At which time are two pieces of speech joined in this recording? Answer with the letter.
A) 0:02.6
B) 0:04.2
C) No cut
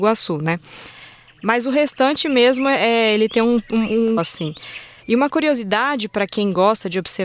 B